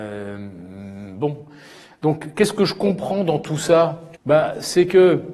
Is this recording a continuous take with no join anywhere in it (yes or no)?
no